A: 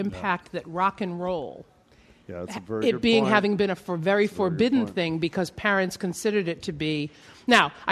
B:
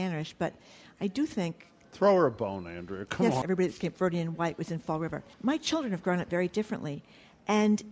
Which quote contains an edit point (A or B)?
B